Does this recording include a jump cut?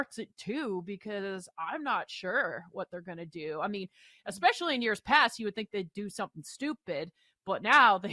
no; 0 cuts

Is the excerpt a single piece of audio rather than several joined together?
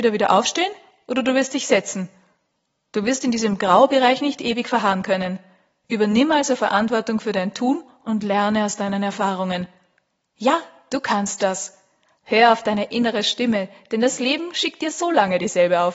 yes; 0 cuts

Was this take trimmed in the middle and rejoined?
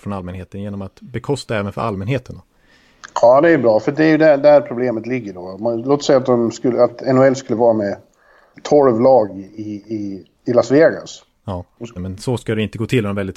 yes; 2 cuts; at 10.3 s, 12.0 s

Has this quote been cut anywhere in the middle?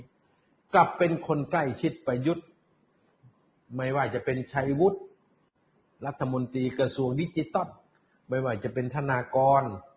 no; 0 cuts

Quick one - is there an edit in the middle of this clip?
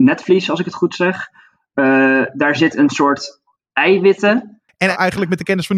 yes; 1 cut; at 4.7 s

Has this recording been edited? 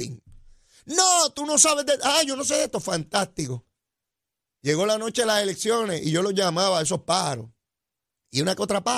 no; 0 cuts

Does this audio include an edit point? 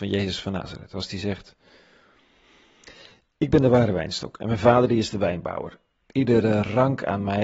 no; 0 cuts

